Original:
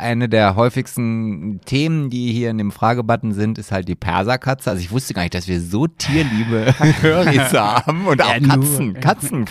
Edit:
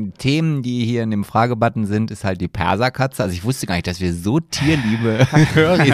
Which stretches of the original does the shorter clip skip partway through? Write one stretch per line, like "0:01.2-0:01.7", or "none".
none